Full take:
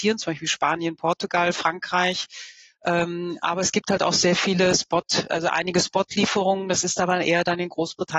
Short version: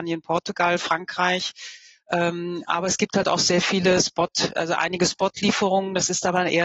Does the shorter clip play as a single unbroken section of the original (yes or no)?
yes